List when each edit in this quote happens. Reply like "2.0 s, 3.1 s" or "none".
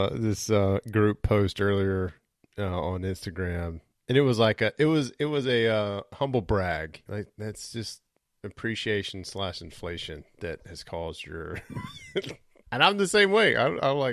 7.1 s, 12.6 s